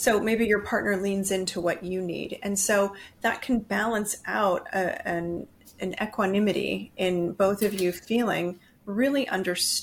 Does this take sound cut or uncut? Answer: uncut